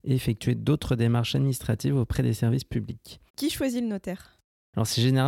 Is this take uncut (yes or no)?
no